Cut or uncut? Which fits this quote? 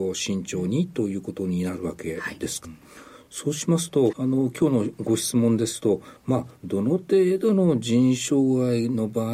cut